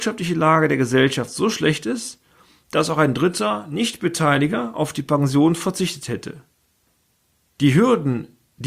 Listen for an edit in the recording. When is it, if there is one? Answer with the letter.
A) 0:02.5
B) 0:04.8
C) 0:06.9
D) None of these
D